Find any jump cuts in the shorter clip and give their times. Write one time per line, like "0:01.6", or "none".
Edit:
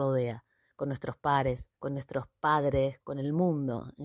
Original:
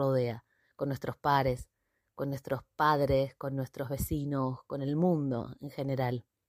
0:01.7
0:03.0